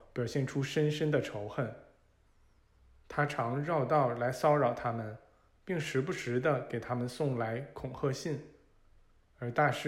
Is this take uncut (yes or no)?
yes